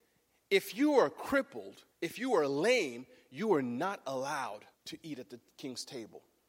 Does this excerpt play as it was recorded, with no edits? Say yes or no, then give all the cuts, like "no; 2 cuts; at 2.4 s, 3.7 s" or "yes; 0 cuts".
no; 2 cuts; at 1.9 s, 4.7 s